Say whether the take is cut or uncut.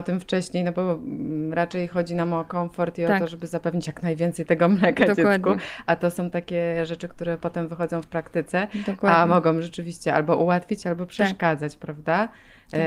uncut